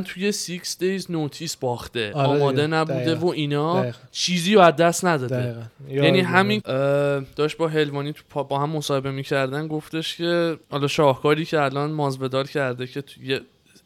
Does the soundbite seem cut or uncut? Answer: cut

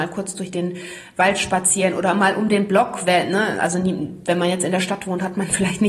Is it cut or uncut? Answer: uncut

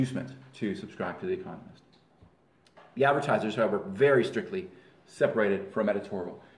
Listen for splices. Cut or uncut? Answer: uncut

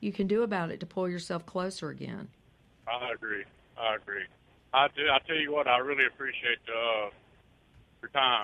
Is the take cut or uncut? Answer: uncut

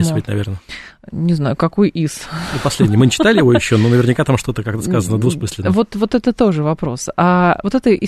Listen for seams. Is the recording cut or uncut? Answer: uncut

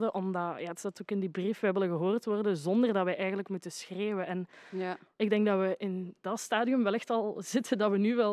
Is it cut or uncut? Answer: uncut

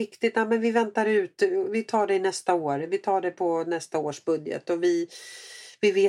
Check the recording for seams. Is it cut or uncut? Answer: uncut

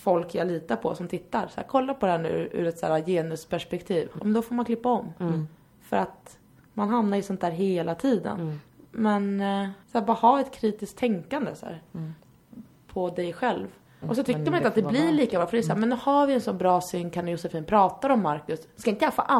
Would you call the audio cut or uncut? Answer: cut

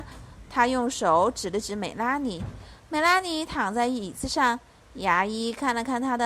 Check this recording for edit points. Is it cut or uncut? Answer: uncut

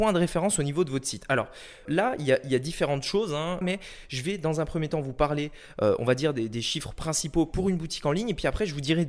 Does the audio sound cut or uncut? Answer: cut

